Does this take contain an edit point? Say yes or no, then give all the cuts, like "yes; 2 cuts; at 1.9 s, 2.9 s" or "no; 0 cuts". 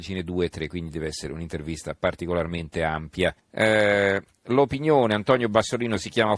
yes; 1 cut; at 3.4 s